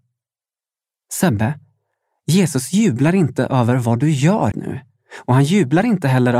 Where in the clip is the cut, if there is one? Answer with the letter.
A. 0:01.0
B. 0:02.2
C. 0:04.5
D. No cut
C